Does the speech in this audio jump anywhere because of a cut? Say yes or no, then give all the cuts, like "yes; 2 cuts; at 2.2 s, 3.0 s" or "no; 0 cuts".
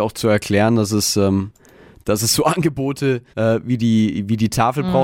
yes; 1 cut; at 3.3 s